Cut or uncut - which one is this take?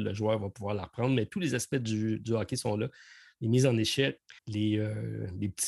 cut